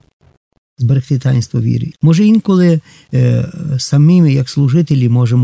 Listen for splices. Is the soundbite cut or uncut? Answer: cut